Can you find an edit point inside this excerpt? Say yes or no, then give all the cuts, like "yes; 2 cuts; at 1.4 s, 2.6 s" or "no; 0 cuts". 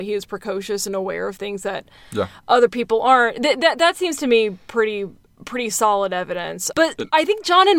yes; 1 cut; at 6.7 s